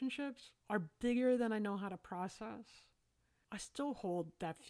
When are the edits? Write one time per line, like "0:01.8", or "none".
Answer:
0:03.4

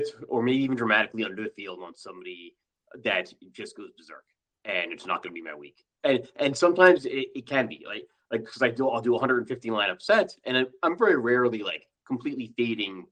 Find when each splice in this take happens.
none

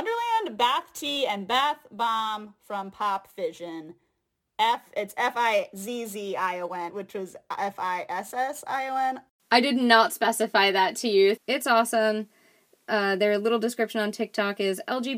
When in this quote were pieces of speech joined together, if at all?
0:06.9
0:11.4

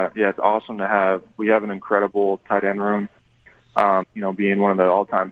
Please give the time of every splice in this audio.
0:04.0

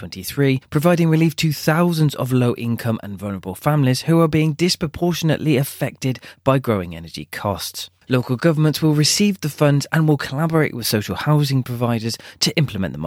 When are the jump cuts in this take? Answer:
none

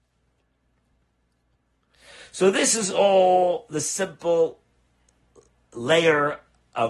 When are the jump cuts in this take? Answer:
none

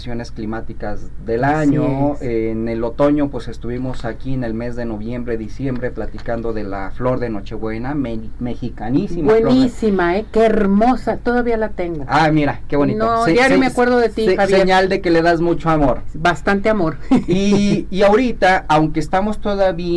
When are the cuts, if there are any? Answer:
none

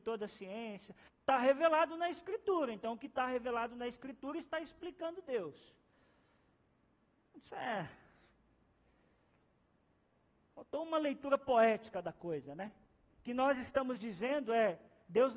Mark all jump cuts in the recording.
0:01.1

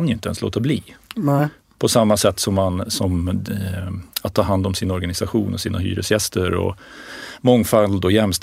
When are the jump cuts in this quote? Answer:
none

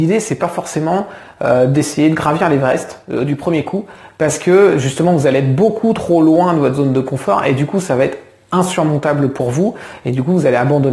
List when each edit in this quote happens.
none

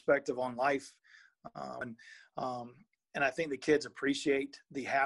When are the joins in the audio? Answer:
0:01.8

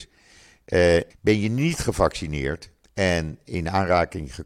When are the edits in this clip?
0:01.1

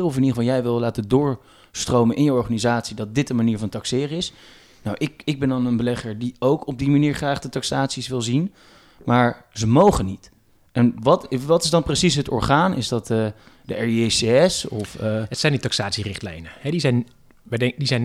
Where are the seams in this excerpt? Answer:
none

